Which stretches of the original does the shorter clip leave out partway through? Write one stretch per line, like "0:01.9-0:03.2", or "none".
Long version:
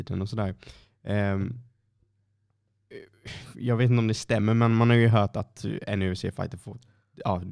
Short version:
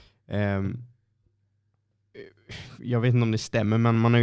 none